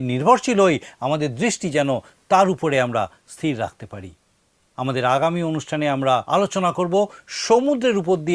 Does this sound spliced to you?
yes; 1 cut; at 6.3 s

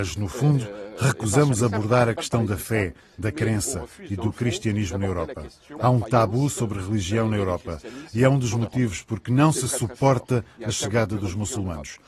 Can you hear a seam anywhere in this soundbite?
yes; 1 cut; at 5.8 s

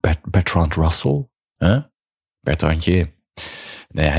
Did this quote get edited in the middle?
yes; 1 cut; at 1.6 s

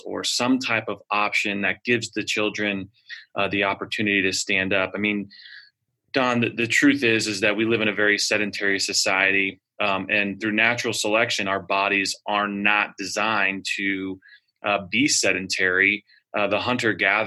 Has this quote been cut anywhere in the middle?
no; 0 cuts

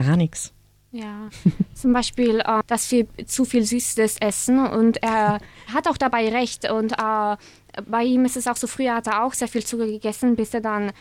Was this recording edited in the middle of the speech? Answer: yes; 1 cut; at 2.6 s

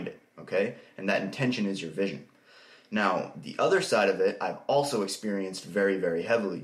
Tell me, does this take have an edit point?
no; 0 cuts

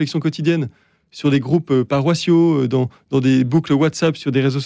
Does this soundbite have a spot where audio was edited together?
no; 0 cuts

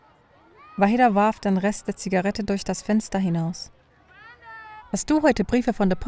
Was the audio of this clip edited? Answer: yes; 1 cut; at 4.8 s

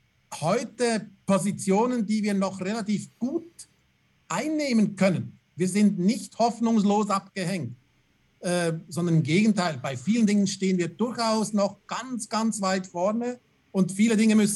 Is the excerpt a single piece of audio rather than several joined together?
yes; 0 cuts

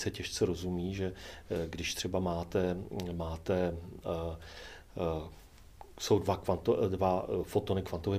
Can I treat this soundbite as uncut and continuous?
yes; 0 cuts

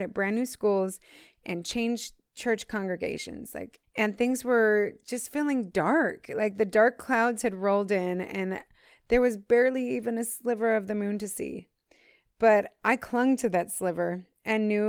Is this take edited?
no; 0 cuts

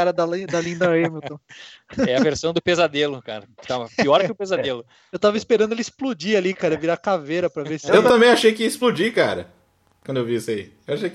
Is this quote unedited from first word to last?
yes; 0 cuts

